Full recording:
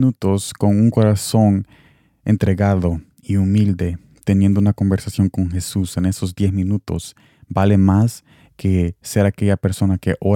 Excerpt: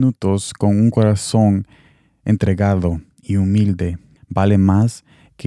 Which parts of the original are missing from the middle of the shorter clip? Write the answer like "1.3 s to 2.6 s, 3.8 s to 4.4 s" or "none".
4.2 s to 7.4 s